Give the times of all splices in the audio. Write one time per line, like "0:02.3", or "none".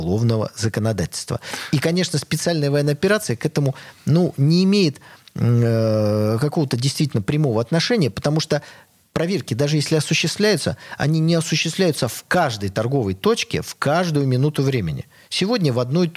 none